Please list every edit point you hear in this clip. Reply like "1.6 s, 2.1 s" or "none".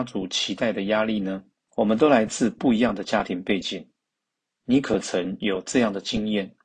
1.7 s